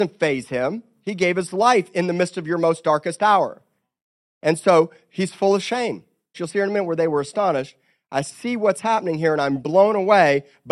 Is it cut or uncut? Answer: cut